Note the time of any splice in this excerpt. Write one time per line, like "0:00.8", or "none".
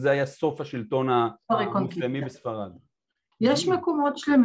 0:03.3